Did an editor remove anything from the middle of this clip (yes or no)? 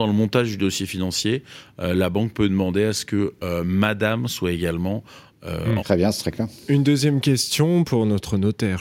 yes